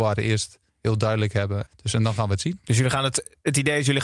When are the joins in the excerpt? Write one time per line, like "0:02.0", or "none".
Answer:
0:01.7